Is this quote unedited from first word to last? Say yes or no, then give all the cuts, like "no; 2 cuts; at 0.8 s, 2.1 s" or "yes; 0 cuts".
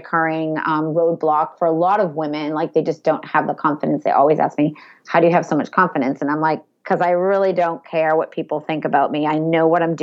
yes; 0 cuts